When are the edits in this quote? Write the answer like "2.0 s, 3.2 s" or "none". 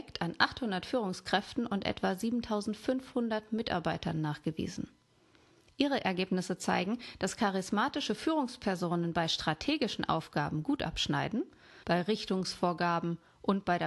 11.8 s